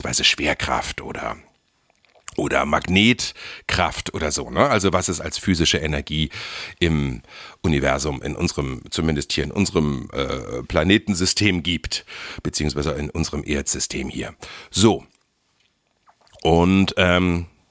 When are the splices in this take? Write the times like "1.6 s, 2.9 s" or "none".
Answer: none